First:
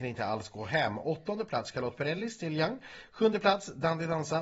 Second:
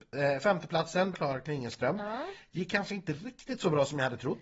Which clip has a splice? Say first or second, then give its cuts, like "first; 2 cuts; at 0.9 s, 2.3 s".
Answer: second; 1 cut; at 1.1 s